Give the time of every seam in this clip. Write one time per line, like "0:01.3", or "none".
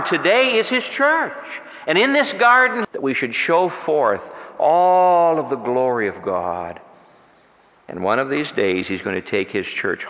0:02.8